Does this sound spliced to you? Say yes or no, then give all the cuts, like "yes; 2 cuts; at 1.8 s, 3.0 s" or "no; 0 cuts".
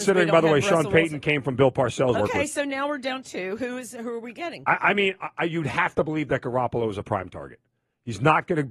yes; 1 cut; at 2.1 s